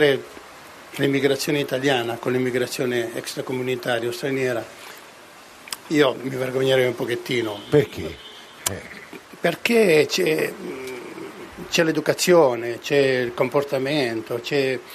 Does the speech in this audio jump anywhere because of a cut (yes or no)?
no